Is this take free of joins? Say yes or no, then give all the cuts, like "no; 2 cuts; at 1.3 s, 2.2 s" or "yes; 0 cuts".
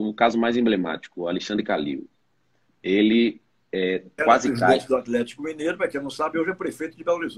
no; 1 cut; at 4.2 s